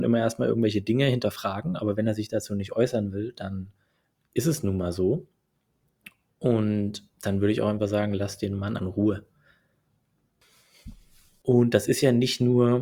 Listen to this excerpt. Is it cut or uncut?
cut